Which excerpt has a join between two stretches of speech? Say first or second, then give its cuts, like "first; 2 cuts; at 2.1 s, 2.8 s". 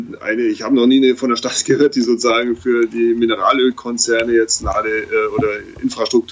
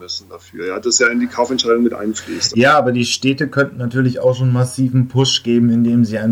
second; 1 cut; at 2.5 s